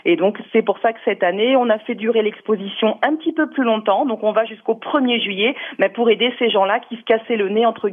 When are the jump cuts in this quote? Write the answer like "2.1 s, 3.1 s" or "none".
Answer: none